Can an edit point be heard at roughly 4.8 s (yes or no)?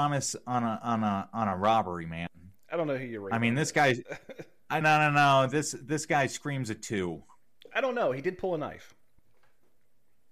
yes